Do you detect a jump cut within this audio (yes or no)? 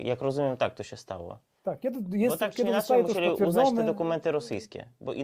no